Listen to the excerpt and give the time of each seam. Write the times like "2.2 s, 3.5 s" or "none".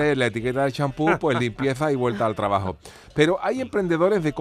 none

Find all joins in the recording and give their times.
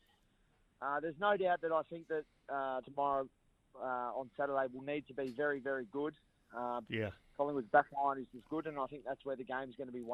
2.8 s, 6.9 s, 8.3 s

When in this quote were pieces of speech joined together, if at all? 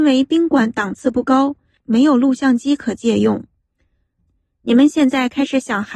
4.2 s

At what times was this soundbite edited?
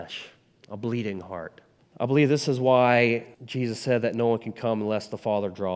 1.8 s, 3.3 s

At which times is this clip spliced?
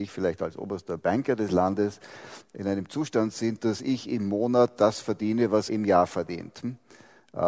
5.7 s

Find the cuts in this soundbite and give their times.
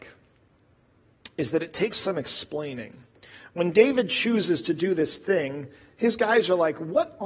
none

